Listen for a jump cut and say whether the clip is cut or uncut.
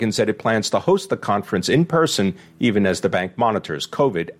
uncut